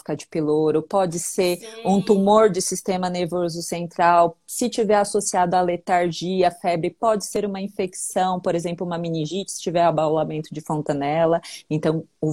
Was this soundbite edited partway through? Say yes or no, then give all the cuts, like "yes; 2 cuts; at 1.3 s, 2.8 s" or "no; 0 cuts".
no; 0 cuts